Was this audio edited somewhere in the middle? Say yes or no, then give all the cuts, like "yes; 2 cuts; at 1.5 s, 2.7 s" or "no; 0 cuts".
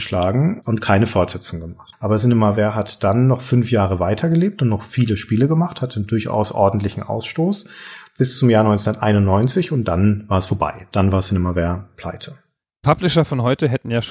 yes; 1 cut; at 1.9 s